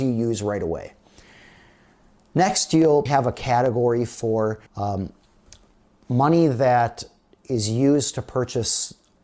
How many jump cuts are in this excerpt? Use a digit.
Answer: 2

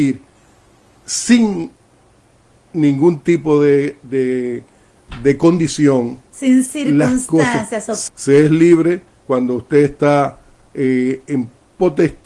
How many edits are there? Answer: 1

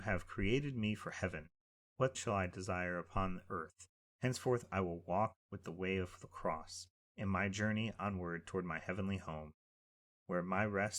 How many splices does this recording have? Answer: 3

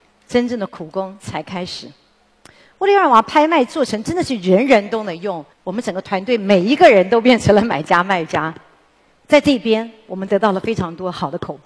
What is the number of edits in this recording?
2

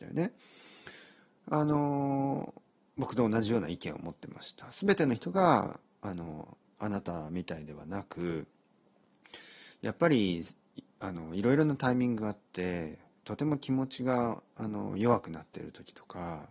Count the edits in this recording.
0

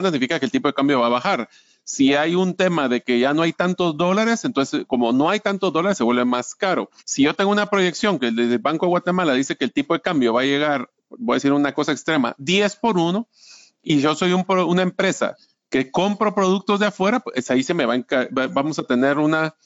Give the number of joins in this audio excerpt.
1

